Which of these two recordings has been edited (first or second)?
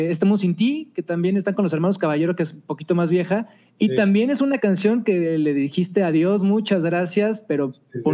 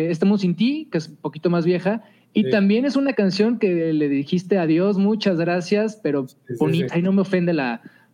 second